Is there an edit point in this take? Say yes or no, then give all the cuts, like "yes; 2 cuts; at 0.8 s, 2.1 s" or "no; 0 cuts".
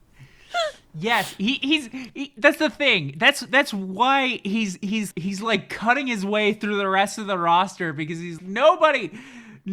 yes; 2 cuts; at 5.1 s, 8.4 s